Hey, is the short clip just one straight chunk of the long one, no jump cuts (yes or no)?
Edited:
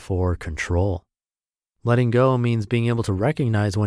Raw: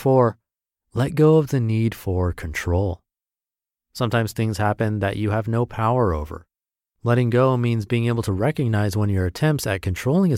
no